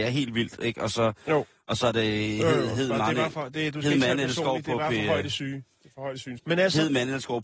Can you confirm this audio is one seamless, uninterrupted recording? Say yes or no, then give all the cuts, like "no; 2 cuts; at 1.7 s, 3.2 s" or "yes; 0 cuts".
no; 1 cut; at 6.4 s